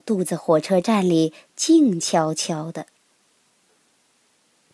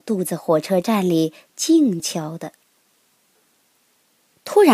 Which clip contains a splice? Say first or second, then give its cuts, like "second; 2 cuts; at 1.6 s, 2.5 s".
second; 1 cut; at 2.0 s